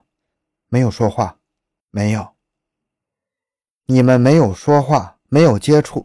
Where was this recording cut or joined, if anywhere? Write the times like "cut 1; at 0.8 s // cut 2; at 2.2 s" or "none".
cut 1; at 1.8 s

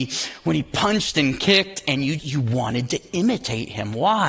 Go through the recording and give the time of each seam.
cut 1; at 2.2 s

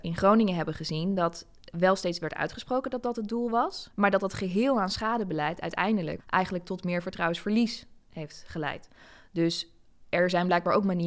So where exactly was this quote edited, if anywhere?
cut 1; at 3.9 s // cut 2; at 6.2 s

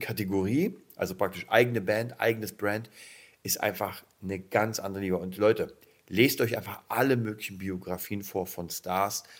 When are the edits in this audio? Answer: none

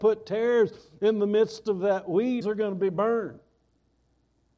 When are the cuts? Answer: cut 1; at 2.4 s

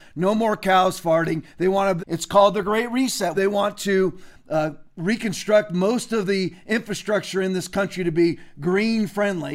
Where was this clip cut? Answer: cut 1; at 2.0 s // cut 2; at 3.3 s

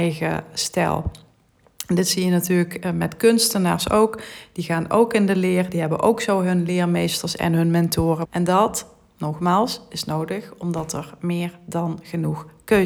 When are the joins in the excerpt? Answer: cut 1; at 8.2 s

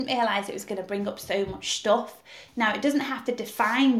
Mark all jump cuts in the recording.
cut 1; at 2.5 s

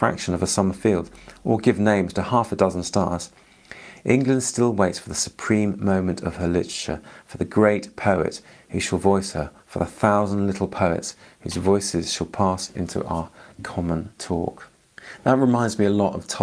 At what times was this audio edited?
cut 1; at 9.6 s

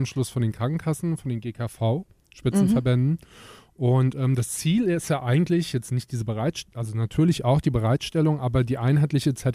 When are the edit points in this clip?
none

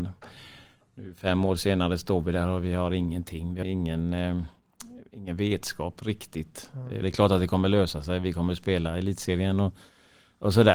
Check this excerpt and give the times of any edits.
cut 1; at 3.6 s // cut 2; at 7.0 s

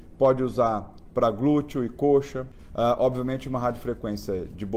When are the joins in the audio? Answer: none

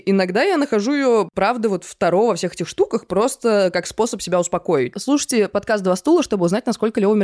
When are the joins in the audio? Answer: cut 1; at 4.9 s

